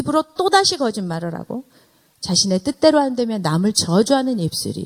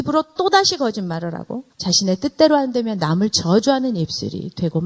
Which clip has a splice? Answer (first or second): second